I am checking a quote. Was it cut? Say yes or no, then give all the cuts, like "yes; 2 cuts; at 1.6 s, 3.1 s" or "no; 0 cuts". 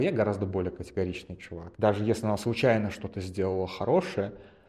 yes; 1 cut; at 1.8 s